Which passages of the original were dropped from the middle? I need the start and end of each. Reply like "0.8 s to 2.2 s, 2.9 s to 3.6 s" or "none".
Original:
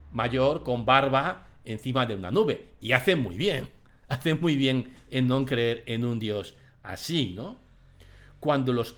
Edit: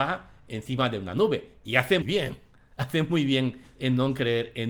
3.2 s to 3.3 s